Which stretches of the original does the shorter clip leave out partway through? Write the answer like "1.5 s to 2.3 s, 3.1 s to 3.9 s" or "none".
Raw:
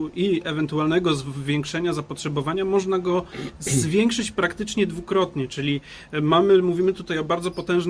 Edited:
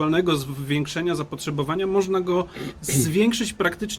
none